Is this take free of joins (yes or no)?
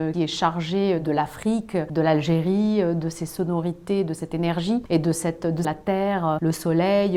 no